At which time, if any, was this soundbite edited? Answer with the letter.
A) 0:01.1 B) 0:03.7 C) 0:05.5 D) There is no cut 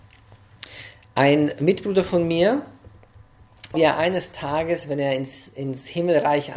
B